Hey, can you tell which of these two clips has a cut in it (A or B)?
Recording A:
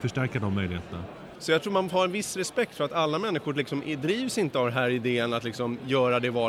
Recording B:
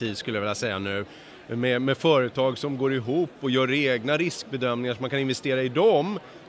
A